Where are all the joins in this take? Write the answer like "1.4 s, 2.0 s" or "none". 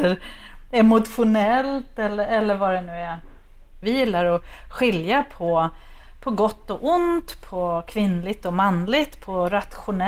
3.8 s